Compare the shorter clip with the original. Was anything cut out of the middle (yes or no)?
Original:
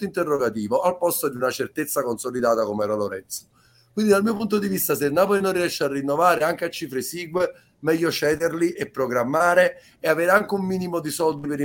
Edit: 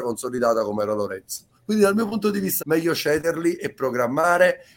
yes